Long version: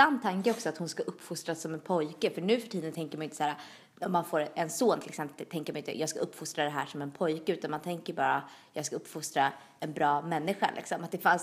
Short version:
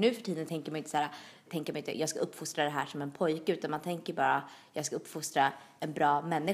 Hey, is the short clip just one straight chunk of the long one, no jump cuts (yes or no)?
no